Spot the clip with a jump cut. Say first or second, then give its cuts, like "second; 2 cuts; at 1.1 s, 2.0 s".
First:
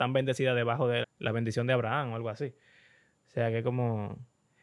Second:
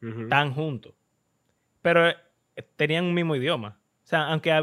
first; 1 cut; at 1.0 s